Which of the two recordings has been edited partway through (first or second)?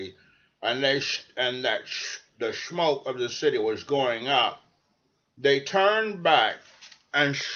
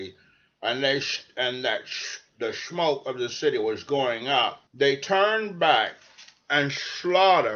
second